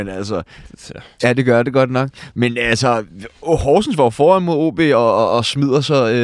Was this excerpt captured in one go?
no; 1 cut; at 1.2 s

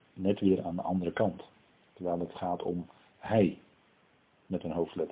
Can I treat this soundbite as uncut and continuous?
yes; 0 cuts

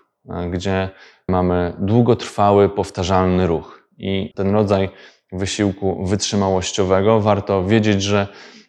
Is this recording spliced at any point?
yes; 1 cut; at 4.3 s

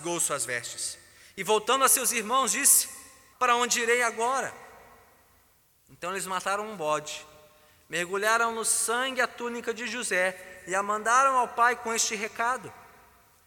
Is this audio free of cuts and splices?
no; 1 cut; at 3.3 s

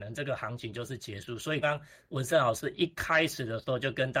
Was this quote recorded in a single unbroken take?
no; 1 cut; at 1.6 s

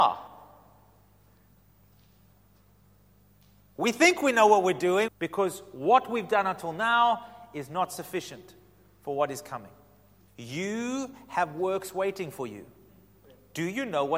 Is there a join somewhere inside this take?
yes; 2 cuts; at 5.1 s, 10.3 s

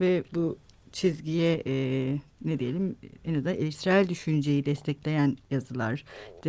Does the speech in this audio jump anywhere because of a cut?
no; 0 cuts

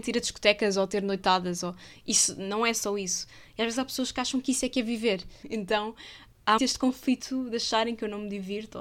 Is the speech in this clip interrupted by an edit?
yes; 2 cuts; at 5.4 s, 6.6 s

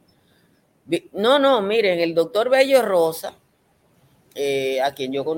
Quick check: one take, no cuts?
yes; 0 cuts

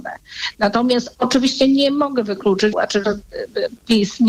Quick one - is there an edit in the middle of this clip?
yes; 1 cut; at 2.7 s

